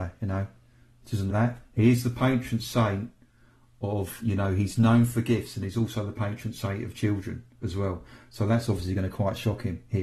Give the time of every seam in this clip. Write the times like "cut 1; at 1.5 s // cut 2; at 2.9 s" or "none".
cut 1; at 1.3 s